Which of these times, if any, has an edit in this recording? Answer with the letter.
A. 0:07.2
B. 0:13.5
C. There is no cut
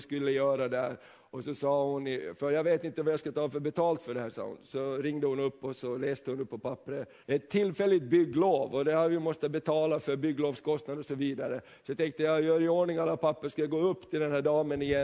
A